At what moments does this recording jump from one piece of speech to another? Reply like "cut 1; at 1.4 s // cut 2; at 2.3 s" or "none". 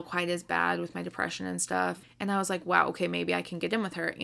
cut 1; at 2.0 s